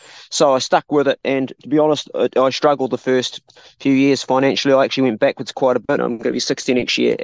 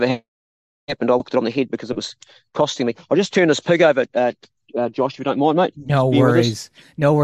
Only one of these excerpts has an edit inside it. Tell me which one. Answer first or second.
first